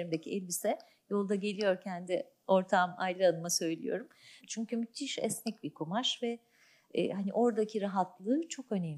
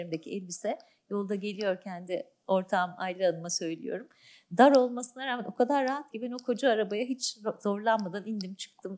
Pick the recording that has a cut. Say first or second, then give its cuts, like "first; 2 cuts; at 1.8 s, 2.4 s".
first; 1 cut; at 4.4 s